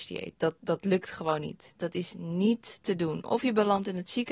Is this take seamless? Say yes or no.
yes